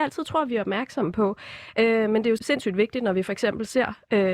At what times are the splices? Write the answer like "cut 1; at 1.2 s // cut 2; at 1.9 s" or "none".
cut 1; at 2.4 s

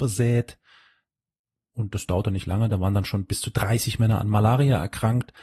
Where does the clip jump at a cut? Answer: none

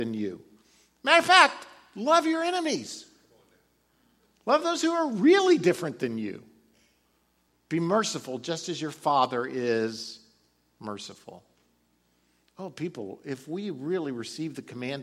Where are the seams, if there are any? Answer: cut 1; at 7.5 s

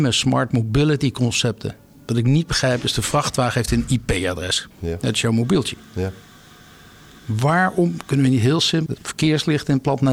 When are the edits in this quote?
cut 1; at 4.7 s // cut 2; at 8.9 s

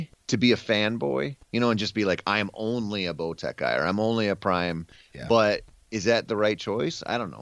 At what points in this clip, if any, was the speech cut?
none

